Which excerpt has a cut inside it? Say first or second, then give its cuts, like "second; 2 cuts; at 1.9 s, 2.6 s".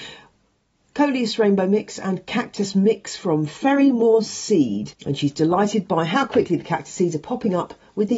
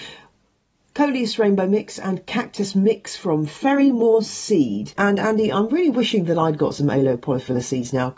second; 1 cut; at 5.0 s